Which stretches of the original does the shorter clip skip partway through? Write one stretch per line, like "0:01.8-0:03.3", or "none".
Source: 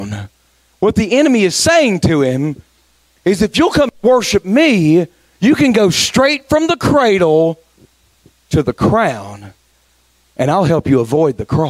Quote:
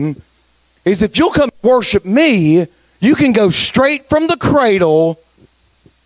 none